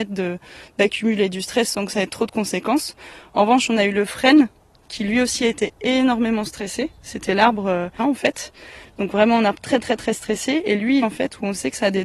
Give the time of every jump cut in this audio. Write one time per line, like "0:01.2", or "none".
0:08.0
0:11.0